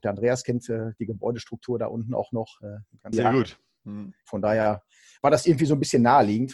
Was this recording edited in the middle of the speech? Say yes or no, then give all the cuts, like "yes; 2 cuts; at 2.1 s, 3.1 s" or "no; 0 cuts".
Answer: yes; 2 cuts; at 3.1 s, 4.3 s